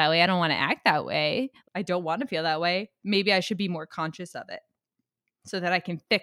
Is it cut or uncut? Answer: cut